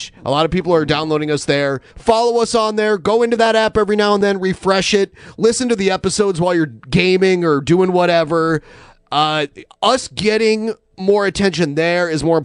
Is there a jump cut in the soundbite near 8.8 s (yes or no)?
no